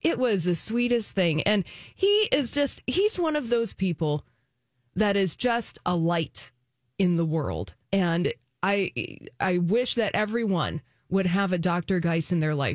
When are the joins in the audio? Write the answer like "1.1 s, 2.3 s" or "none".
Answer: 7.8 s